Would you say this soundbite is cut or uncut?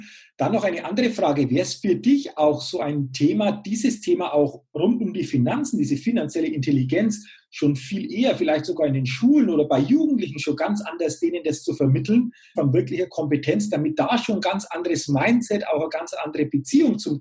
cut